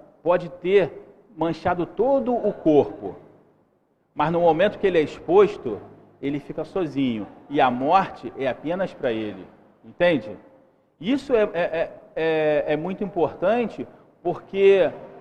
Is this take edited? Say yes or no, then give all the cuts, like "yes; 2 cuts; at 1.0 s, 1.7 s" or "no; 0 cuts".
no; 0 cuts